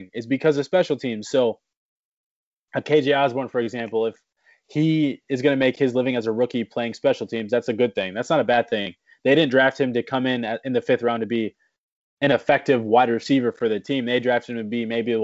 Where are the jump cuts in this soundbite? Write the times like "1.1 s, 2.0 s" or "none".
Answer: none